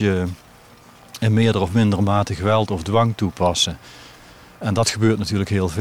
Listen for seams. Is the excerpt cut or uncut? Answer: uncut